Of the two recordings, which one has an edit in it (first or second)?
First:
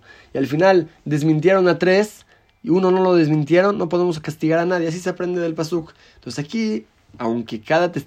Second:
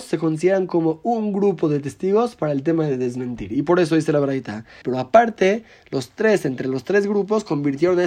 second